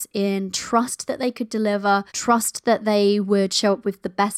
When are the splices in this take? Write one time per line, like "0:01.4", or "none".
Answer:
0:02.1